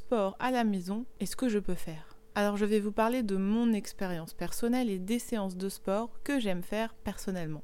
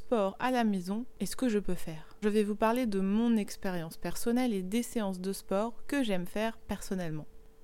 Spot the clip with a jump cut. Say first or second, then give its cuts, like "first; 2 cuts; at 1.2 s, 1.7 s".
second; 1 cut; at 2.2 s